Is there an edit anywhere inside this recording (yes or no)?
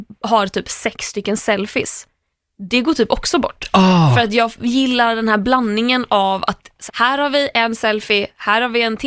yes